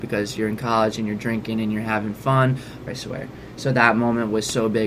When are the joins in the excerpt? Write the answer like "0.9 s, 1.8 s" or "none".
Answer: 2.9 s